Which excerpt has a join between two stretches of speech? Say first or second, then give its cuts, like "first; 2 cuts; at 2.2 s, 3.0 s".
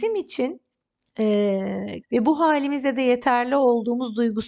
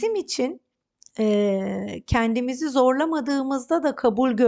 first; 1 cut; at 2.0 s